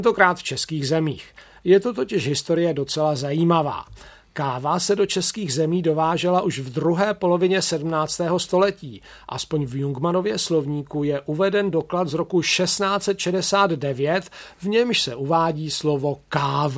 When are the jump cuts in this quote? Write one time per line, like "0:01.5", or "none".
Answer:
none

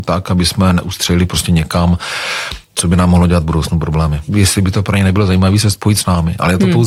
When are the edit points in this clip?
0:04.3

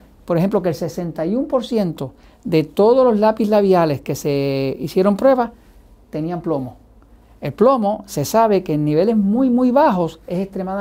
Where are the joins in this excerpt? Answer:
none

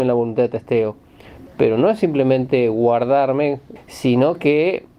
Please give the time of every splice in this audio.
0:01.5
0:03.8

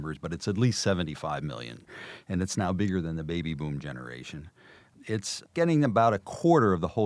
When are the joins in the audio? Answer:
none

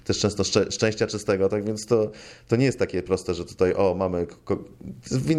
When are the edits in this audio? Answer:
none

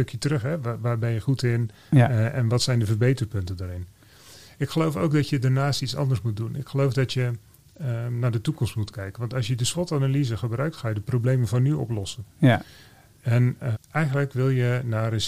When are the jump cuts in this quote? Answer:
0:13.7

